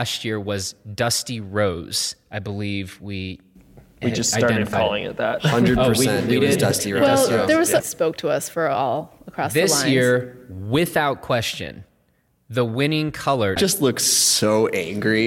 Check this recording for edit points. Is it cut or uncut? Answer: cut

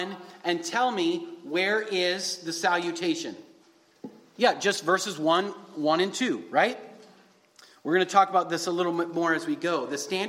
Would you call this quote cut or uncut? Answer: cut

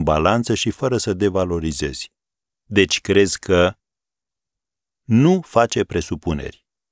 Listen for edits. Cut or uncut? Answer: cut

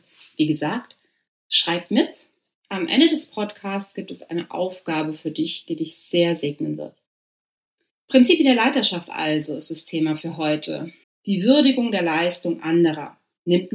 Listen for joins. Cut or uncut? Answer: cut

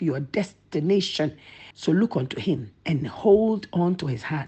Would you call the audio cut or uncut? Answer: cut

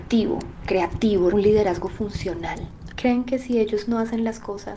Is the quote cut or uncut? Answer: cut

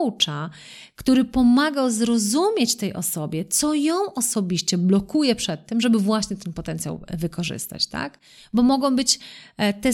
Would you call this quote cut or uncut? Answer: uncut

